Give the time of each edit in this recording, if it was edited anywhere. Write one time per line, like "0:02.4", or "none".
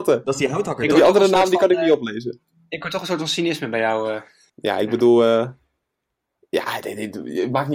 0:04.5